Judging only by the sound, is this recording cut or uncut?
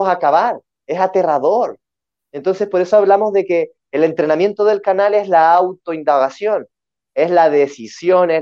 uncut